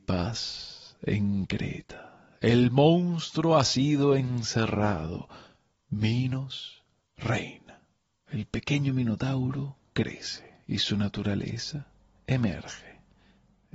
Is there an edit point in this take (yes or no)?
yes